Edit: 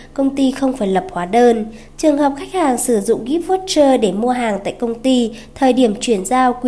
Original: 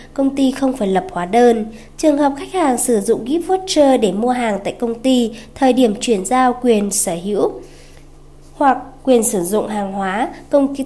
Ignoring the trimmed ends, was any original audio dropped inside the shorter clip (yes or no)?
no